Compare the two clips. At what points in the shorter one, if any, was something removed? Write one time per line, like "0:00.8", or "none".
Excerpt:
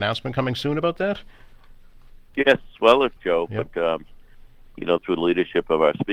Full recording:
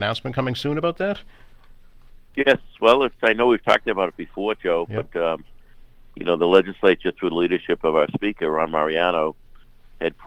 0:03.2
0:05.0